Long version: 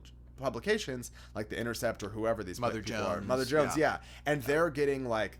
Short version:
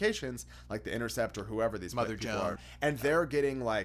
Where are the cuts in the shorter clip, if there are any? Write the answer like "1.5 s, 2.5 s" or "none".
2.6 s